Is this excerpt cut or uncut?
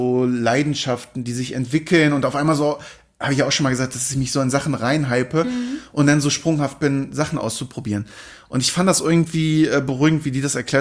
uncut